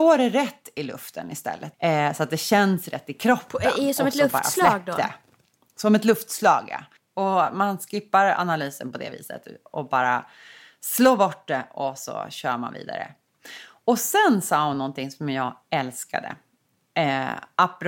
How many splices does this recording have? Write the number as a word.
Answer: one